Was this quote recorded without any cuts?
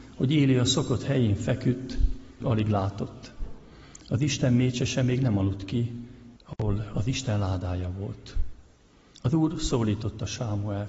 no; 2 cuts; at 2.4 s, 6.4 s

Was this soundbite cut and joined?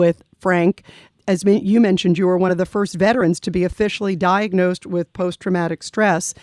yes; 1 cut; at 1.1 s

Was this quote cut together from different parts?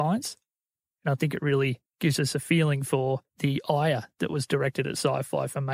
yes; 1 cut; at 3.3 s

